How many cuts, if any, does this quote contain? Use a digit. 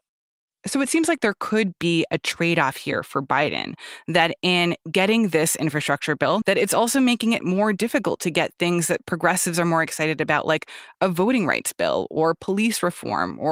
1